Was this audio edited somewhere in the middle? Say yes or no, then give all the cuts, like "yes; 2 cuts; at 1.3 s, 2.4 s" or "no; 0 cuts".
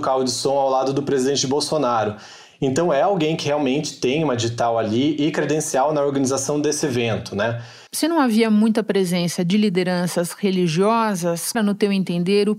yes; 2 cuts; at 7.9 s, 11.5 s